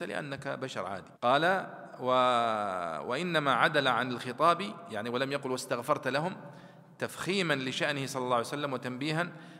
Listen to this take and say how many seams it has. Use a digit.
1